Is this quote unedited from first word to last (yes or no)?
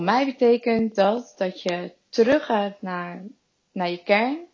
yes